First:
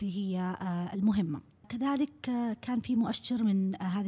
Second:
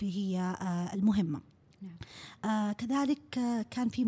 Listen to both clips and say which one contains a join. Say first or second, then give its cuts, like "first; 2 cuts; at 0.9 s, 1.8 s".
first; 1 cut; at 1.6 s